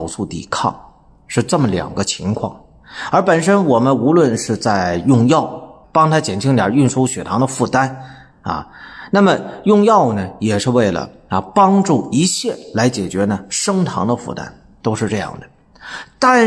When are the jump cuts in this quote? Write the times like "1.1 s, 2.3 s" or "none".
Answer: 5.8 s